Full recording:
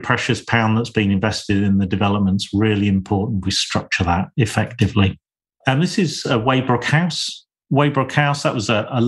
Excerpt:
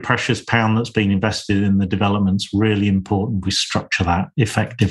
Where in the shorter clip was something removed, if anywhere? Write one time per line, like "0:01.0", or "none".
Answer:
none